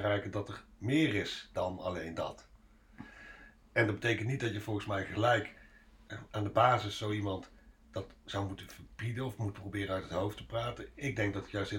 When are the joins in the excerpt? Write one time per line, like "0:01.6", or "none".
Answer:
none

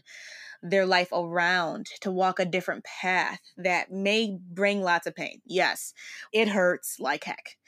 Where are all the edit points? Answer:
0:06.3

